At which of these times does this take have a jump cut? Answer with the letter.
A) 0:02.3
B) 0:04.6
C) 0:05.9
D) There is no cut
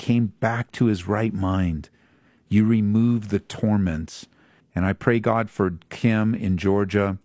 B